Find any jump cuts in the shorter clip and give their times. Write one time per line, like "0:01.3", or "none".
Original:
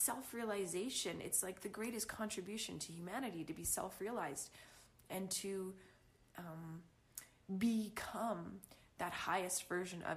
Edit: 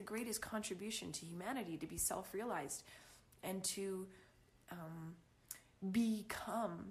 none